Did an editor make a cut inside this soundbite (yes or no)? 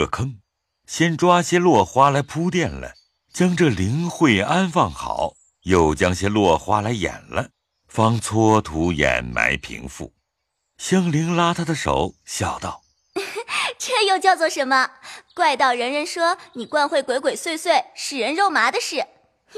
no